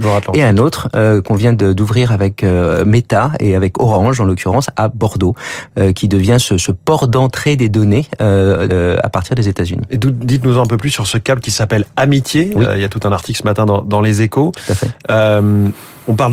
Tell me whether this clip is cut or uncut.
cut